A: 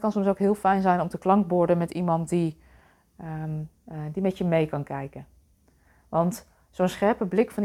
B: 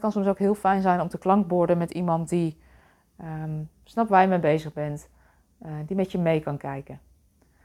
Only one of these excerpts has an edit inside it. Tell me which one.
A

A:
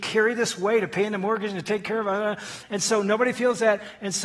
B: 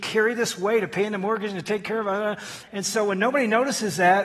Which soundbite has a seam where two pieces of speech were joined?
B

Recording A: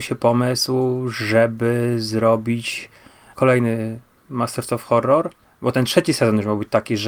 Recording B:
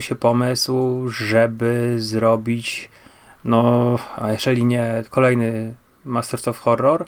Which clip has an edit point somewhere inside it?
A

